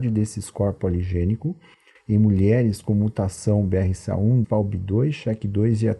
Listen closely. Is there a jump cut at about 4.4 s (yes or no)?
yes